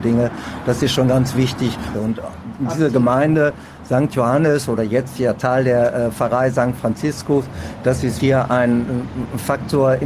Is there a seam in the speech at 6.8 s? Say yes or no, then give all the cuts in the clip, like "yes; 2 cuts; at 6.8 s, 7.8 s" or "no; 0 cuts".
no; 2 cuts; at 1.9 s, 8.2 s